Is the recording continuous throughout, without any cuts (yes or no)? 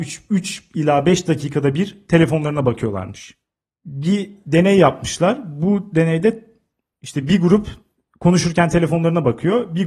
yes